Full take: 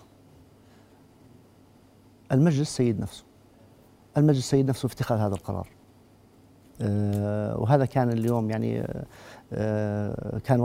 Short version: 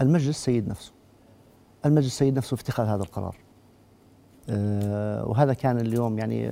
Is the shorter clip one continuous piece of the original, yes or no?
yes